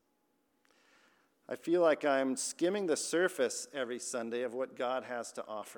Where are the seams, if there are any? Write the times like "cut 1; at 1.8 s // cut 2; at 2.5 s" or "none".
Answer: none